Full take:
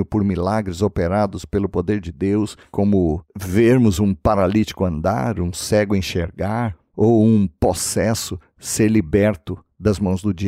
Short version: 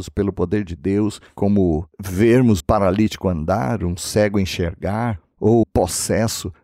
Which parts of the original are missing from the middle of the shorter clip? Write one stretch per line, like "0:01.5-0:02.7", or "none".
0:04.0-0:04.2
0:07.2-0:07.5